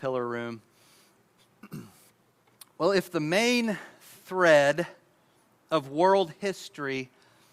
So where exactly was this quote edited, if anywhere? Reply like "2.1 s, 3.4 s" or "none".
1.4 s